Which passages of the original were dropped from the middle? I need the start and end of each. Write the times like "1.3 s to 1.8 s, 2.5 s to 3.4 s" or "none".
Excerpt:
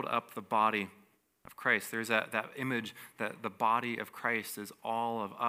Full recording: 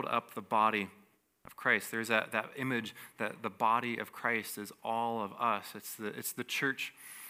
none